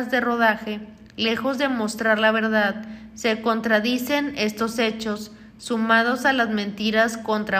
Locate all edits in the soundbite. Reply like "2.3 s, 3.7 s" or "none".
none